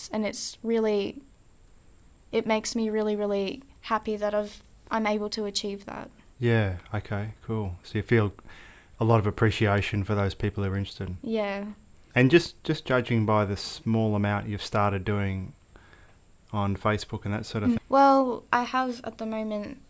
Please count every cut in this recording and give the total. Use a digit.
2